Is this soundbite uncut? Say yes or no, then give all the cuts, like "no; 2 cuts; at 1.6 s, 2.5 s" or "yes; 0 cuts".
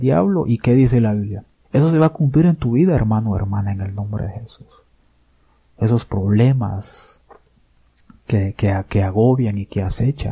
no; 1 cut; at 1.6 s